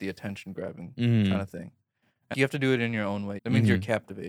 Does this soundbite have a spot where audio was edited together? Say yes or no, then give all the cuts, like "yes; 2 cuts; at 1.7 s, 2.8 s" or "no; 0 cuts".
yes; 2 cuts; at 2.3 s, 3.4 s